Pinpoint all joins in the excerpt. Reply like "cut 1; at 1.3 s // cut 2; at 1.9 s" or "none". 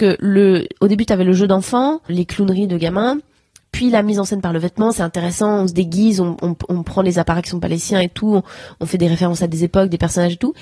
cut 1; at 2.1 s